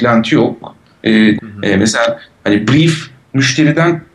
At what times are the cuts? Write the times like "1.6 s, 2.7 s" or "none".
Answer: 1.4 s